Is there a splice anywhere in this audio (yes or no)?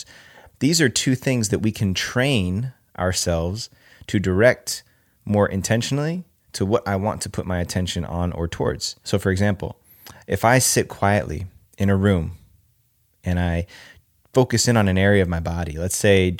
no